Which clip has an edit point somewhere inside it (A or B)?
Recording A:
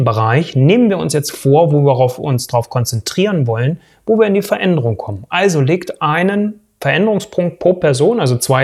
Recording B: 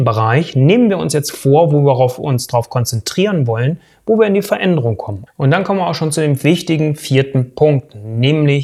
B